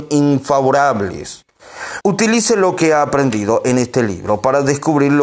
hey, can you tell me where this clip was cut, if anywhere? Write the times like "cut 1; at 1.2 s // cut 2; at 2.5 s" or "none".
cut 1; at 2.0 s